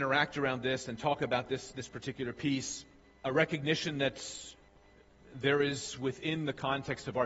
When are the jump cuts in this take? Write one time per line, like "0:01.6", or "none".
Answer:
0:03.2